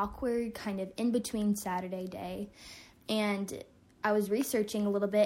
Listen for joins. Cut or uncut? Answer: uncut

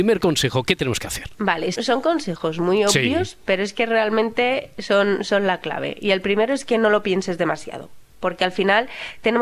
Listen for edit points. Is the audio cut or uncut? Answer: cut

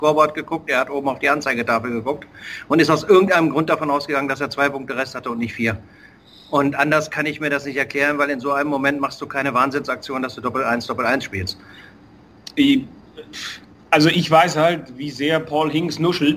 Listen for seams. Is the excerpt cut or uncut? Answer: uncut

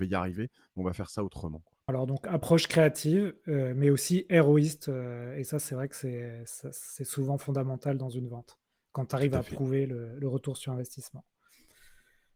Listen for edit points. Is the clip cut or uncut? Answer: cut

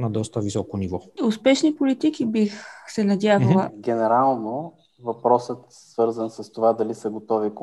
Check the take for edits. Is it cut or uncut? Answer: cut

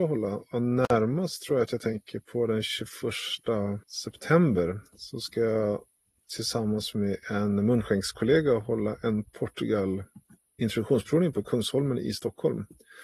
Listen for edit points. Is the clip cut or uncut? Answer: cut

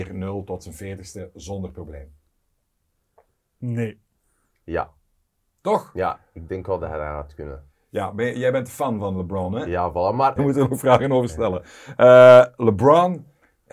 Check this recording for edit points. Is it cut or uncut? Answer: cut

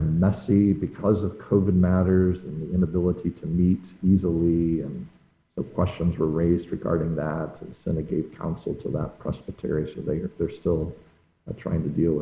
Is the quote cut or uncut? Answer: uncut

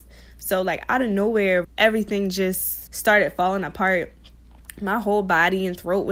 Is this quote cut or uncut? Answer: cut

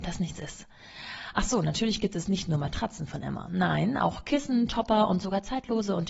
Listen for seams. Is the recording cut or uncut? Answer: uncut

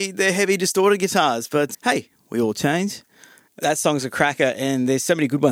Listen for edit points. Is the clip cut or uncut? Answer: cut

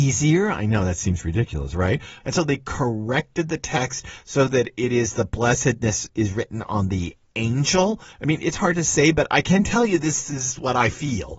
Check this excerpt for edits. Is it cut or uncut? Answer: cut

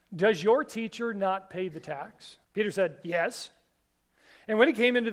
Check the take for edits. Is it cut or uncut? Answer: cut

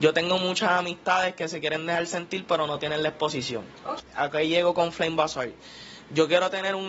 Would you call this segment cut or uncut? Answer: cut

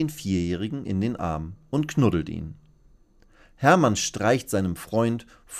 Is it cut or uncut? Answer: uncut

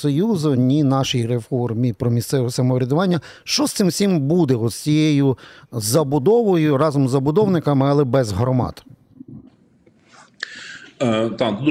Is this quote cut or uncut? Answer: uncut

